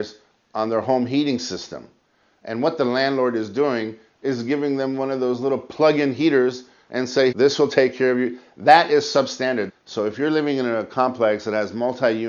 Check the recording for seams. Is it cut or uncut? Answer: cut